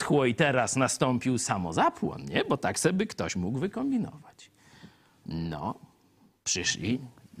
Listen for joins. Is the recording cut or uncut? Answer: cut